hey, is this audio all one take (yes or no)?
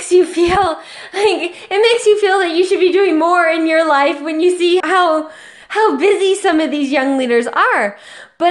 no